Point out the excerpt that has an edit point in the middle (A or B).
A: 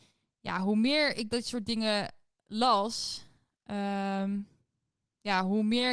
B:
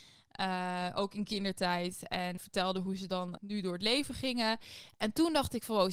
B